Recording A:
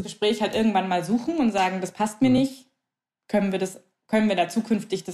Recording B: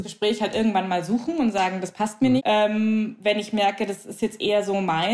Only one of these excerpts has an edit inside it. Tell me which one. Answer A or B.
B